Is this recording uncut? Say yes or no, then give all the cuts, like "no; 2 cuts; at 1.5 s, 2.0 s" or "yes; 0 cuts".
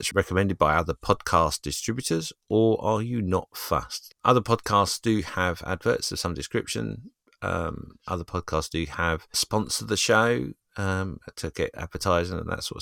no; 1 cut; at 4.1 s